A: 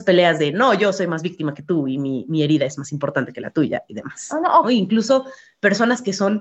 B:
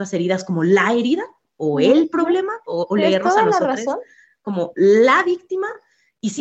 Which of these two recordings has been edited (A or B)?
A